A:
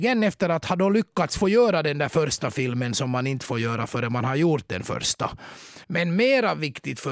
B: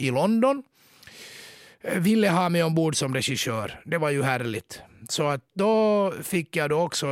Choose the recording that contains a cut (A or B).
A